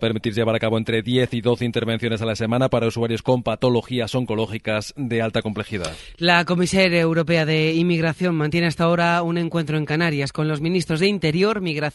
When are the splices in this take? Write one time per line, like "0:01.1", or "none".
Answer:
none